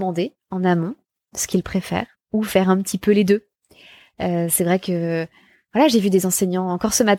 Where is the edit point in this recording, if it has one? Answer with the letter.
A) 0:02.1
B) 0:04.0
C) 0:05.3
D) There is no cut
A